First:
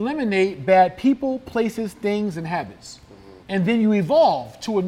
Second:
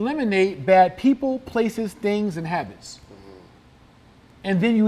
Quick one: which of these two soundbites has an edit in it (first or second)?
first